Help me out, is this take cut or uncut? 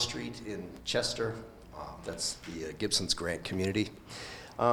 uncut